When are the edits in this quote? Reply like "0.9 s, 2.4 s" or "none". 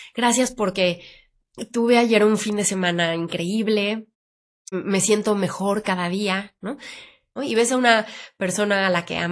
4.7 s, 7.4 s